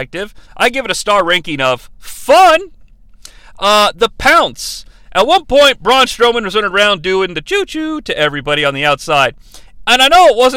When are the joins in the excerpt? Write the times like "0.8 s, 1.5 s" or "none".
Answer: none